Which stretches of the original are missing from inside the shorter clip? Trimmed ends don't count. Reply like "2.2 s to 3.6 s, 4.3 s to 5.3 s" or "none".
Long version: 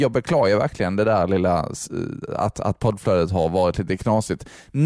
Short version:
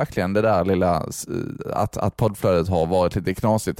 none